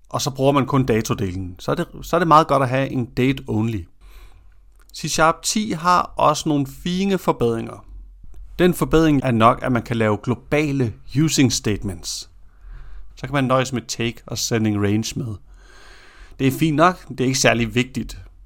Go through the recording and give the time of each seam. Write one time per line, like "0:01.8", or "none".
0:09.2
0:13.1